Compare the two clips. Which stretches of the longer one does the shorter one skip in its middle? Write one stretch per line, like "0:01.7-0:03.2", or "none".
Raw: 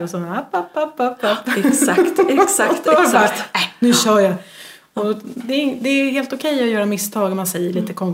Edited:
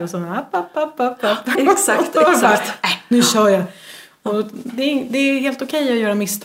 0:01.5-0:02.3